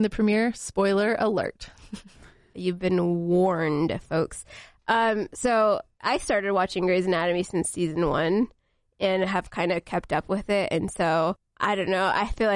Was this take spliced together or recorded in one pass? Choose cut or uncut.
uncut